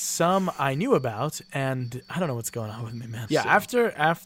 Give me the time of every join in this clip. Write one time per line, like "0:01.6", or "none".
0:03.3